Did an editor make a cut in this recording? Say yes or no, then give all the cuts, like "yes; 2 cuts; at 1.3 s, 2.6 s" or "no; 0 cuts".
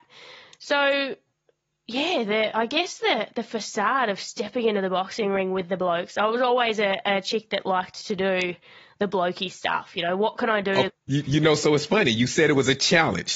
yes; 1 cut; at 10.9 s